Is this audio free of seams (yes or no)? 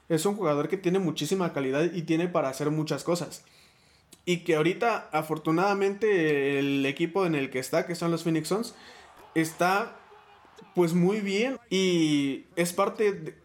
no